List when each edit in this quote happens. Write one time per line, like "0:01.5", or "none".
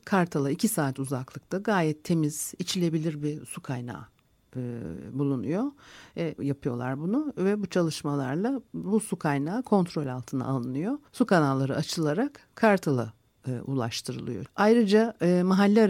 0:06.4
0:11.1
0:14.5